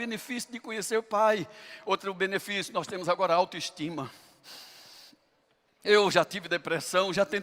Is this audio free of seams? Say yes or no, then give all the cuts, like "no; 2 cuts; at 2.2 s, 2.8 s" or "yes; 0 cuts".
yes; 0 cuts